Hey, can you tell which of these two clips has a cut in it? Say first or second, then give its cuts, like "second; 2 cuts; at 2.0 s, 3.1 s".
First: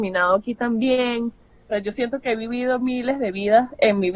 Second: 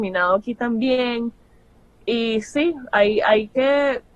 first; 1 cut; at 1.7 s